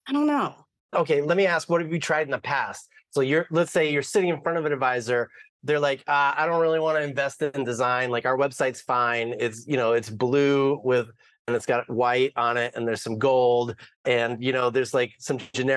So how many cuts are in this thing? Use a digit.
0